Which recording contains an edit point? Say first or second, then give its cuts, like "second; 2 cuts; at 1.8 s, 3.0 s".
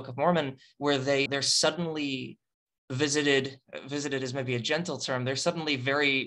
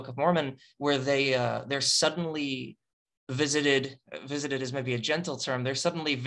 first; 1 cut; at 1.3 s